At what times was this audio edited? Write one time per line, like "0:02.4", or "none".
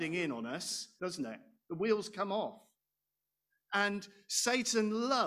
0:01.0